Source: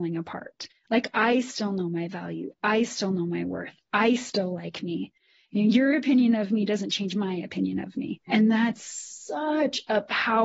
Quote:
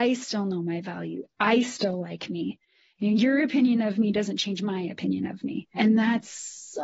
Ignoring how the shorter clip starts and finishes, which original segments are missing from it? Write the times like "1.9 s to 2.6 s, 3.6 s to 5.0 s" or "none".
2.6 s to 3.8 s